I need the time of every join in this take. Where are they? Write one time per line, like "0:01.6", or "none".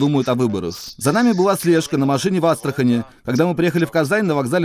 none